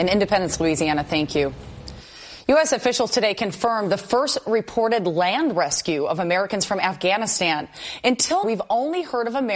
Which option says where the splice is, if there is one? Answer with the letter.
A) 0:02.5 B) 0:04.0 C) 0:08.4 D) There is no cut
C